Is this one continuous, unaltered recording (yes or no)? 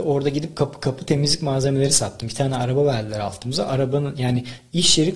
yes